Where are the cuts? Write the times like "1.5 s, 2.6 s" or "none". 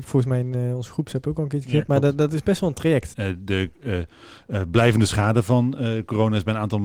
3.1 s